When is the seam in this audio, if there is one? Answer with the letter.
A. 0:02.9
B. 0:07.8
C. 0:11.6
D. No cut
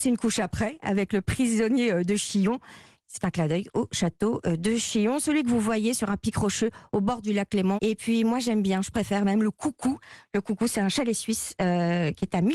B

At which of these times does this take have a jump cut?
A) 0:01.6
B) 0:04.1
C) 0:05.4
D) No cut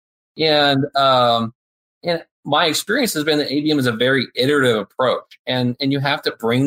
D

